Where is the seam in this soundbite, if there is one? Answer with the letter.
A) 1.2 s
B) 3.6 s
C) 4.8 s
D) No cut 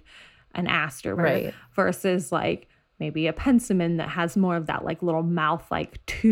A